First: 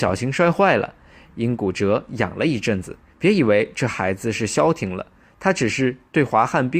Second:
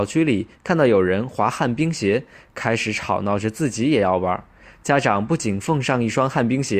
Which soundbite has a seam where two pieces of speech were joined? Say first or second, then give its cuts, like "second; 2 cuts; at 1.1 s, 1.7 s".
first; 1 cut; at 3.1 s